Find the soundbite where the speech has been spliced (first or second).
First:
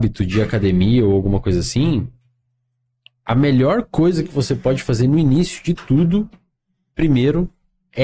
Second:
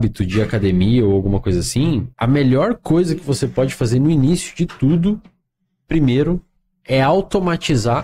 second